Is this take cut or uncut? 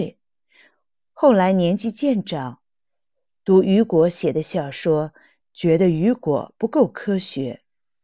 cut